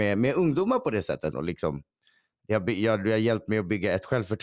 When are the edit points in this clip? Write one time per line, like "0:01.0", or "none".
0:01.3